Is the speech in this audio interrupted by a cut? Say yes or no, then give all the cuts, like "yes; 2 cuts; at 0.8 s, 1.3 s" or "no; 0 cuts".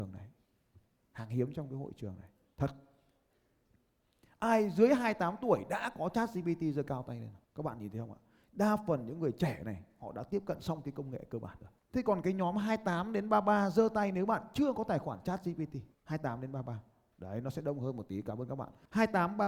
yes; 2 cuts; at 7.4 s, 15.9 s